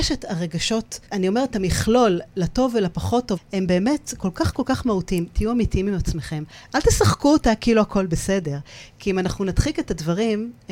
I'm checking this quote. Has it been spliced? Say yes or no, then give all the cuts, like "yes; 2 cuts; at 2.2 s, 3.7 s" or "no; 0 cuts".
yes; 2 cuts; at 1.1 s, 3.4 s